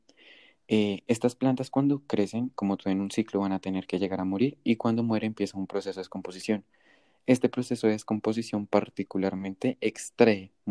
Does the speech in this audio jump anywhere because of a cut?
yes; 1 cut; at 2.5 s

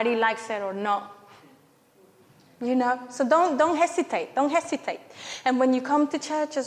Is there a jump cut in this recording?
no; 0 cuts

